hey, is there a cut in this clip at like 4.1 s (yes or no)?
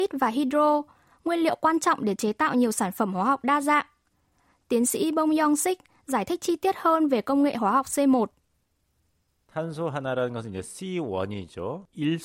no